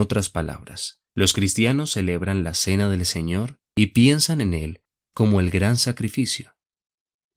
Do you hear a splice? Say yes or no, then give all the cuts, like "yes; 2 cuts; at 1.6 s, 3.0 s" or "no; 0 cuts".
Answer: yes; 2 cuts; at 1.1 s, 3.7 s